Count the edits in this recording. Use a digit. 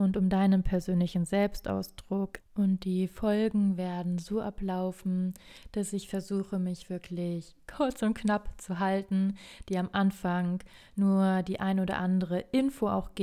1